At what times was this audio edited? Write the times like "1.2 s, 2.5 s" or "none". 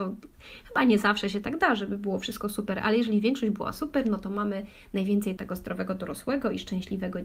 5.4 s